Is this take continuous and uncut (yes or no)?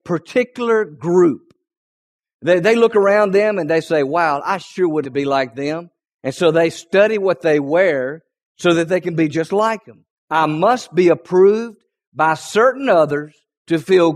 no